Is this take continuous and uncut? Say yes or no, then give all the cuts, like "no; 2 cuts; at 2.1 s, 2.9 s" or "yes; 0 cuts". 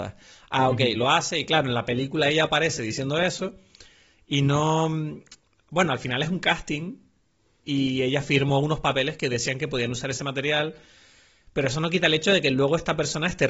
yes; 0 cuts